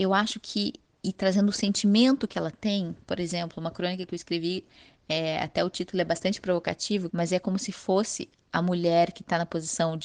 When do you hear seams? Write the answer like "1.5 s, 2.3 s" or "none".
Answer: 7.1 s